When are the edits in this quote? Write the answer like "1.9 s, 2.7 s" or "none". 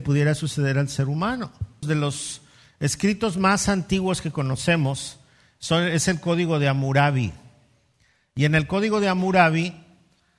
1.8 s